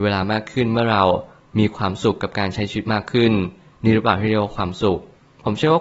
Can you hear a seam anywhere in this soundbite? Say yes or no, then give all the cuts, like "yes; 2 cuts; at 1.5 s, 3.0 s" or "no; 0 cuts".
no; 0 cuts